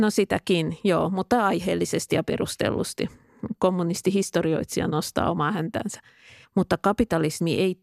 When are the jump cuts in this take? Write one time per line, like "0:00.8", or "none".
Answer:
0:06.4